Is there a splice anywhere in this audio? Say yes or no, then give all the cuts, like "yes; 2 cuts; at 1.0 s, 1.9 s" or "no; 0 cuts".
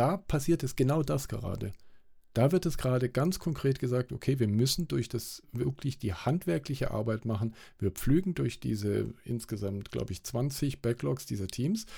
no; 0 cuts